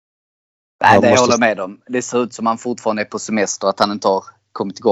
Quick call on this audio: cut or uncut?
uncut